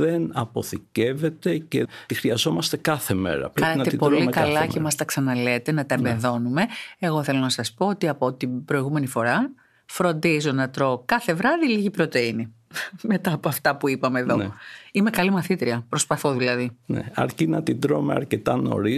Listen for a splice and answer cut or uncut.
uncut